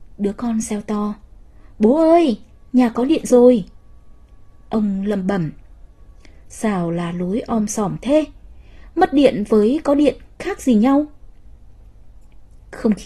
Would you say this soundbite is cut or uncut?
uncut